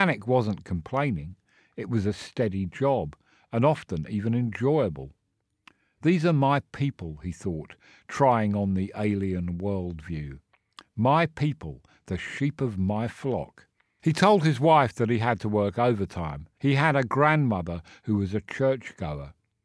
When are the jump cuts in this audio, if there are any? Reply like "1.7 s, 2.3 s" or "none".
14.0 s, 16.6 s